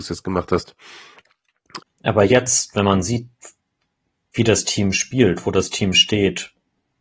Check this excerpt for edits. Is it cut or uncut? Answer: cut